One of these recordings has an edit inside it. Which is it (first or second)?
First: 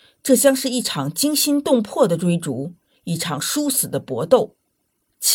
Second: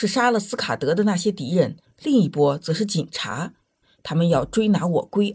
second